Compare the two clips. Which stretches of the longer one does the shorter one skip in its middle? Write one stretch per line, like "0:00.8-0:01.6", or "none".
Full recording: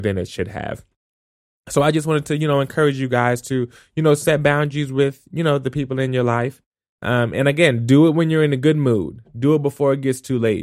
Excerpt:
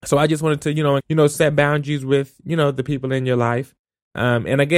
0:02.6-0:03.9